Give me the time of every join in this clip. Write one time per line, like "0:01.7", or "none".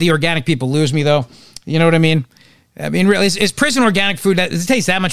none